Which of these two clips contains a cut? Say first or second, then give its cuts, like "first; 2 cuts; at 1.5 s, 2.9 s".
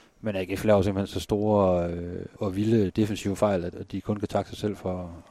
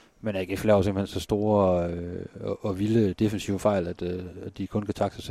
first; 2 cuts; at 2.4 s, 3.7 s